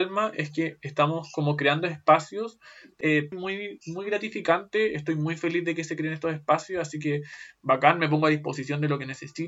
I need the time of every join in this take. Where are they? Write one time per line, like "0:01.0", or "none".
0:03.3